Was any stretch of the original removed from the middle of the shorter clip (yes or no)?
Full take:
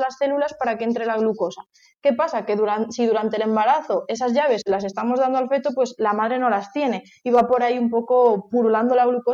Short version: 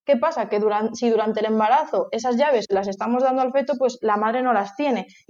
no